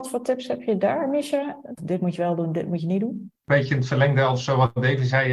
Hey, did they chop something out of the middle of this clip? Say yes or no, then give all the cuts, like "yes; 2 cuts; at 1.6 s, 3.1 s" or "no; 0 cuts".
yes; 1 cut; at 1.8 s